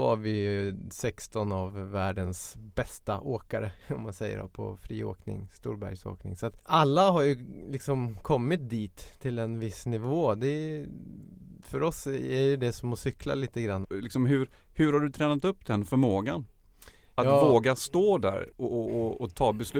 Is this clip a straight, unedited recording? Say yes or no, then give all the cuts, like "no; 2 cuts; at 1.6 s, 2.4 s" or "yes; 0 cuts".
no; 2 cuts; at 6.6 s, 13.8 s